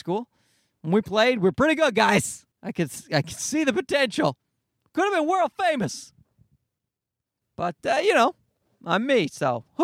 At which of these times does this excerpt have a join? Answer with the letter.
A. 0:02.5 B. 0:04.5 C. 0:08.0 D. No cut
A